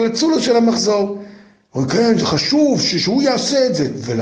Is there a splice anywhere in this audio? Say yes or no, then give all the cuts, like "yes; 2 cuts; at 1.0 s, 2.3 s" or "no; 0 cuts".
no; 0 cuts